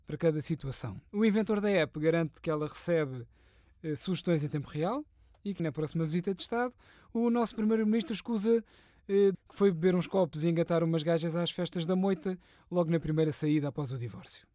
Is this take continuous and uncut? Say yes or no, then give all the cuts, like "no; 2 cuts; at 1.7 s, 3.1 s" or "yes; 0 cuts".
no; 2 cuts; at 5.6 s, 9.3 s